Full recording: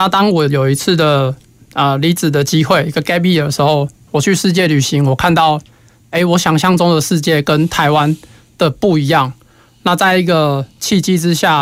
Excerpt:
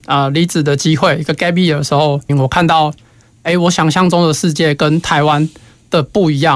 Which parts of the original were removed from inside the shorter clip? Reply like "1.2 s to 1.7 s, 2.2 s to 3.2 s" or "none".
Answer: 4.0 s to 5.0 s